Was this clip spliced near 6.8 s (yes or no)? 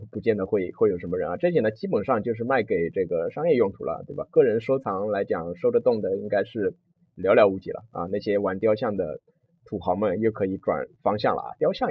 no